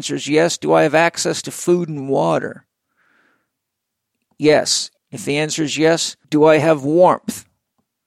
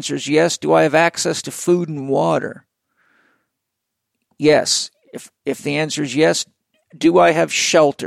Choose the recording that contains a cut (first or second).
first